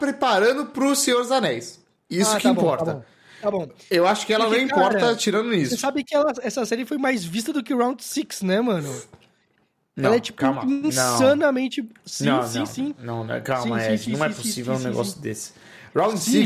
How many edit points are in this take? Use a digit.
0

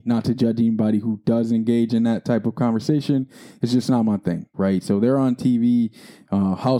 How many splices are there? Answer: 1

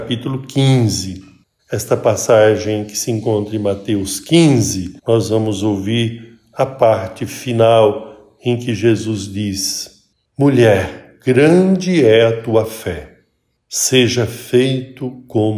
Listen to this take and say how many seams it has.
2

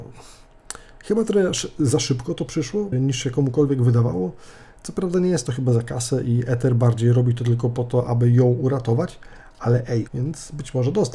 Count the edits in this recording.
2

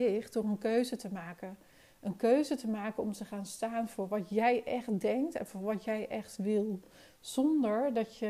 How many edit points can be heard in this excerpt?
0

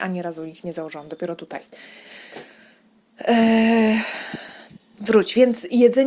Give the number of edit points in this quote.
0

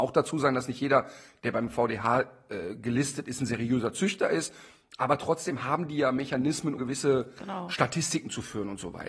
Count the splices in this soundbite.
1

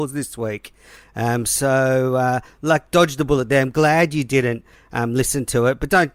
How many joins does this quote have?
0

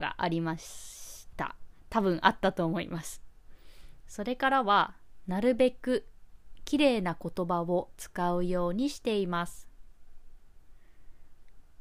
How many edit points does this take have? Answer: 1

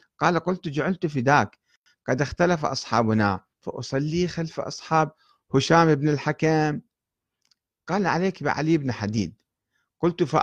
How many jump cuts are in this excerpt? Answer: 1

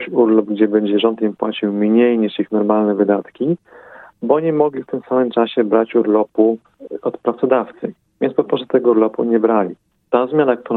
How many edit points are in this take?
0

